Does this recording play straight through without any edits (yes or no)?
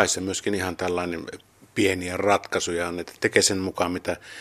no